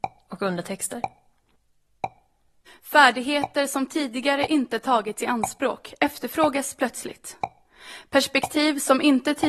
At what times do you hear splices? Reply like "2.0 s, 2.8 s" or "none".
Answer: 2.7 s